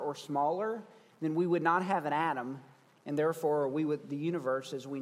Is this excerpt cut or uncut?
uncut